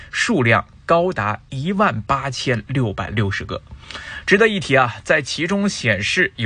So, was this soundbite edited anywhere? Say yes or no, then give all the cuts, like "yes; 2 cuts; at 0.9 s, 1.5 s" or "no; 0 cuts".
no; 0 cuts